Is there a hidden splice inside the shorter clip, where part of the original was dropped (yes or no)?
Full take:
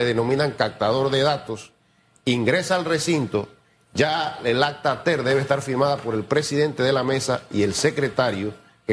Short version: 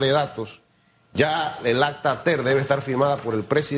yes